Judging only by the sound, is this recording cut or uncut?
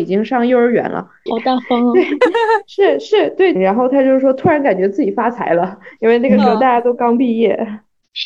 cut